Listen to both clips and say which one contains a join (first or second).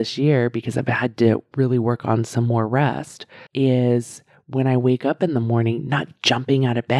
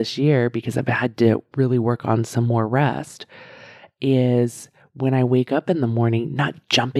first